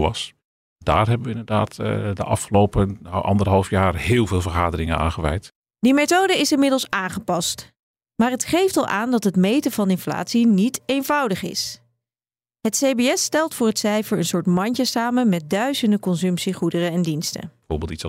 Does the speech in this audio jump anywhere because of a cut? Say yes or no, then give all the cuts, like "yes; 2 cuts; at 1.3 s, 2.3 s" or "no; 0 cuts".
no; 0 cuts